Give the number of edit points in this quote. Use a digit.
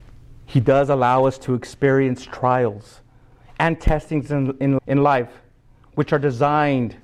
1